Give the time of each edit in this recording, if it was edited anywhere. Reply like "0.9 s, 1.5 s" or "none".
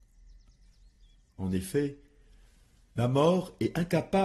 none